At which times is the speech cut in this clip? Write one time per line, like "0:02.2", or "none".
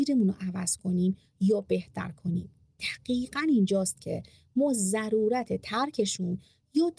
none